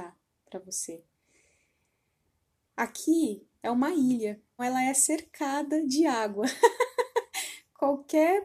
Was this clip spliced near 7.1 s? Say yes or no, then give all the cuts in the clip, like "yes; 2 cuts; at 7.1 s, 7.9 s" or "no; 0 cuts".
no; 1 cut; at 4.6 s